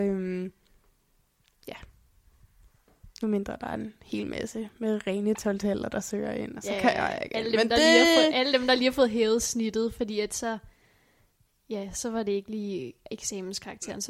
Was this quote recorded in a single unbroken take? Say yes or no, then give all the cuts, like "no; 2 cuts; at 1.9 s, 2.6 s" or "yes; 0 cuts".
yes; 0 cuts